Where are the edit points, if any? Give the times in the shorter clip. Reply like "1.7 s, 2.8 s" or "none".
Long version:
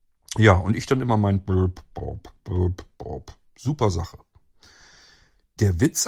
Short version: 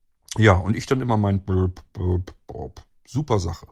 1.9 s

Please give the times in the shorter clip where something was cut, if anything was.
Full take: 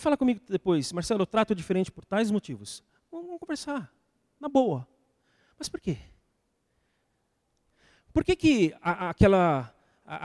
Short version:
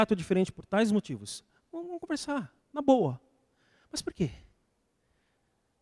2.6 s

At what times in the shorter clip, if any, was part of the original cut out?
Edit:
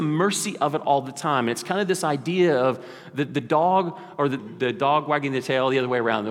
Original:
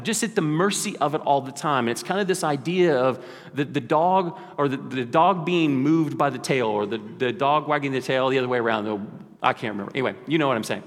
4.4 s

